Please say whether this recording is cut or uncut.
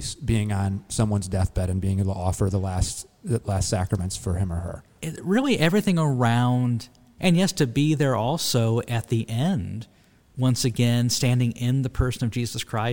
cut